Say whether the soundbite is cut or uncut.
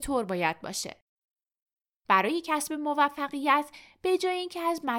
cut